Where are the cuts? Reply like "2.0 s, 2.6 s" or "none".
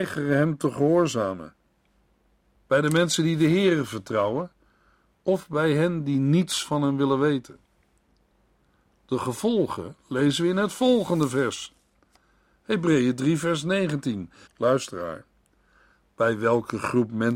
2.5 s, 14.5 s